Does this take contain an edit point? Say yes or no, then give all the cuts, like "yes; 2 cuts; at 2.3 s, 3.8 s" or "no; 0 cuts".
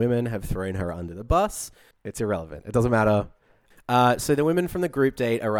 yes; 2 cuts; at 1.9 s, 3.7 s